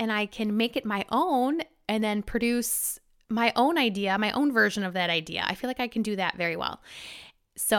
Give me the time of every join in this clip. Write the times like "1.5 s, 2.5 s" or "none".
none